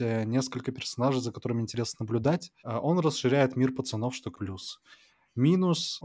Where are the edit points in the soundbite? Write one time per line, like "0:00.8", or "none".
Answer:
0:02.6
0:04.3